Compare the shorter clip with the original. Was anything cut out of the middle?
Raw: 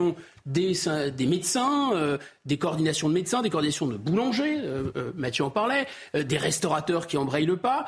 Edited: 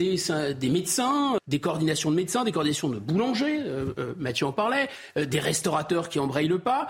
yes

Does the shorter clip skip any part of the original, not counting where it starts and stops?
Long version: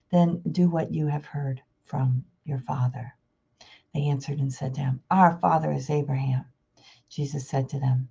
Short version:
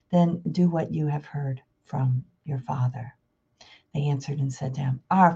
no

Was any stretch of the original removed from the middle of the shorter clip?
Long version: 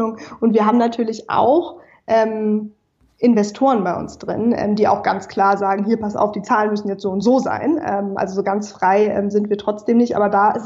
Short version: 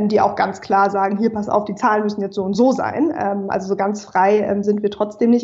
no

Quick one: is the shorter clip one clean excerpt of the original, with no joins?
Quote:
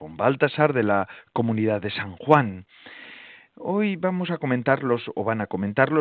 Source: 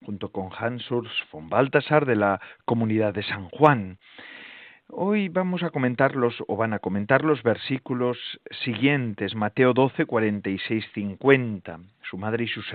yes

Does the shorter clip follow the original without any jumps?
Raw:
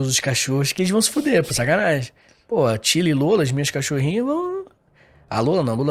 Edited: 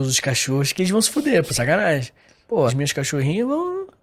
no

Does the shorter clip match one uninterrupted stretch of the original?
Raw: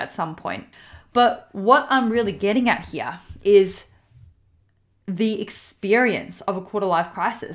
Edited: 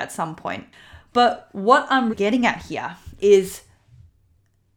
no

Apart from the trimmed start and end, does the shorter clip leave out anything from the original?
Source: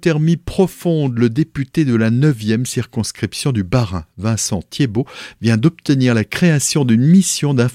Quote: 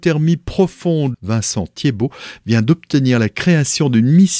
yes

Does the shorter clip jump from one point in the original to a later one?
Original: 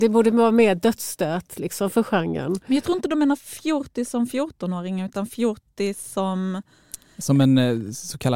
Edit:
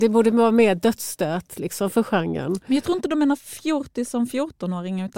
no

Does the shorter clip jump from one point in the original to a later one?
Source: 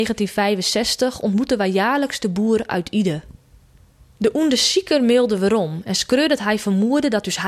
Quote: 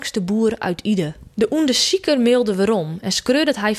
yes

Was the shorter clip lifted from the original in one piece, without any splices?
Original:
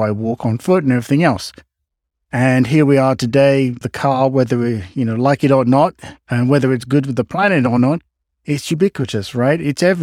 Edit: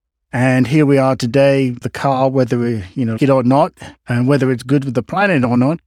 no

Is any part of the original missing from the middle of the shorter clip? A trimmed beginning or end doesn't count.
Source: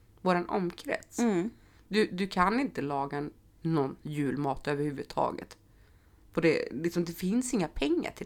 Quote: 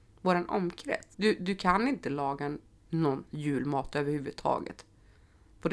yes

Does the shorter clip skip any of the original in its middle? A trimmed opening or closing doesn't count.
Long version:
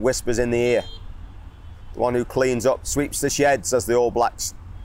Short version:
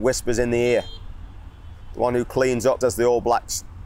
yes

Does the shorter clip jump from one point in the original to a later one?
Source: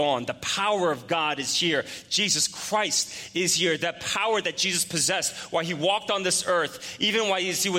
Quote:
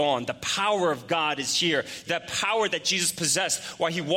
yes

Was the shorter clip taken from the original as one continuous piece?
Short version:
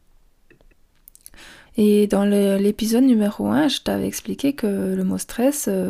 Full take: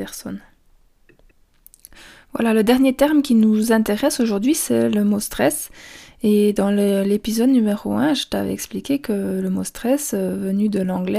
no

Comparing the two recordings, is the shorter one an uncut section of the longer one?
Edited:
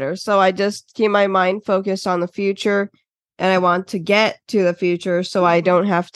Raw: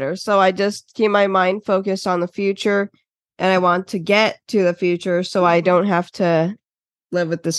yes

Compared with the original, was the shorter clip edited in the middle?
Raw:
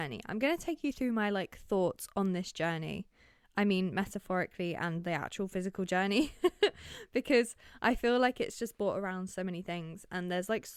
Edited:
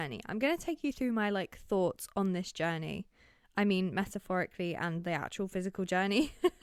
no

